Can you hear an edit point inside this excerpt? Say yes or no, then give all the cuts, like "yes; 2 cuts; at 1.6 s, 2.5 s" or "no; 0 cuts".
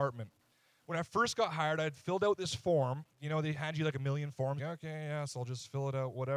yes; 1 cut; at 4.6 s